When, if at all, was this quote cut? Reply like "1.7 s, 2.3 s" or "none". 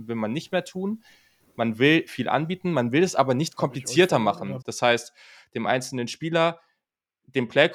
4.6 s